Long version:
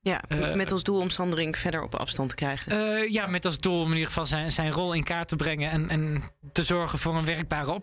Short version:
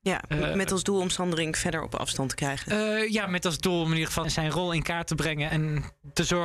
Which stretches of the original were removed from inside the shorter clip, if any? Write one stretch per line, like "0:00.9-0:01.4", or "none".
0:04.2-0:04.5
0:05.7-0:05.9